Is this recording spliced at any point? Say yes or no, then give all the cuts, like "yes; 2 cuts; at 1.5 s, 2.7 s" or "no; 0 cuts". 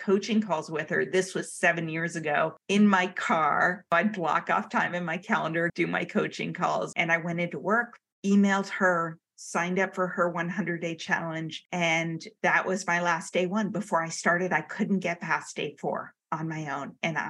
yes; 2 cuts; at 5.7 s, 6.9 s